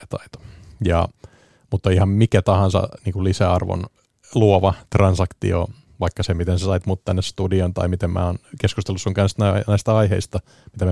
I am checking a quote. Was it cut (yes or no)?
no